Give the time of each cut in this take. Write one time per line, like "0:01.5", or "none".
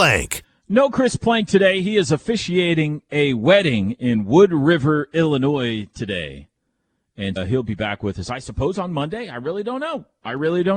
0:07.4